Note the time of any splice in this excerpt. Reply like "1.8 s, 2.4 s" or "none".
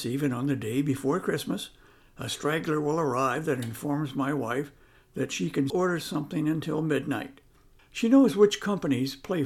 5.7 s, 7.8 s